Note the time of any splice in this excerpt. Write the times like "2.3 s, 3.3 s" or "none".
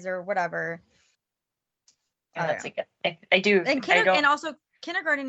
none